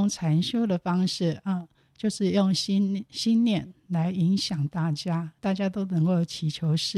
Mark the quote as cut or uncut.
uncut